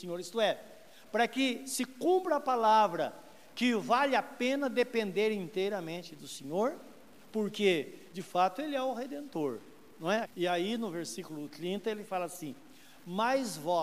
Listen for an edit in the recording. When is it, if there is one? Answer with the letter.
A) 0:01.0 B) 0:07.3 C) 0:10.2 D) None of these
C